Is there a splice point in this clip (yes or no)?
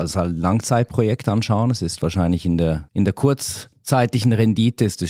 yes